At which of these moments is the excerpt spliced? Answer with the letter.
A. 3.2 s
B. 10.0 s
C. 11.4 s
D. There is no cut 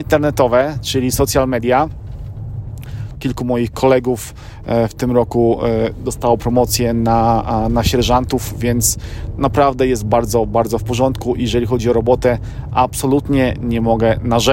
A